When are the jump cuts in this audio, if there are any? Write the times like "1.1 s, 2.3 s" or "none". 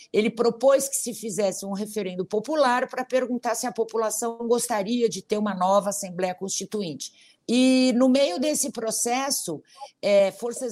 7.4 s